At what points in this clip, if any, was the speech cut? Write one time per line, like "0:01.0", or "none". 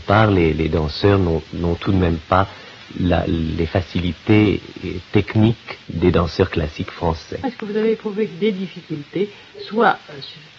0:05.8
0:07.4